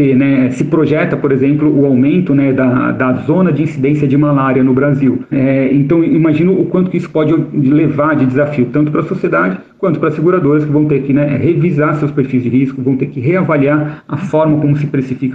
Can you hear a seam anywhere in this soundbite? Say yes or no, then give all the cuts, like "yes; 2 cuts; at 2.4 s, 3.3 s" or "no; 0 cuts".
yes; 1 cut; at 5.3 s